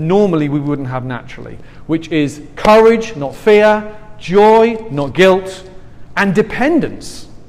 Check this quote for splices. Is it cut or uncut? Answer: uncut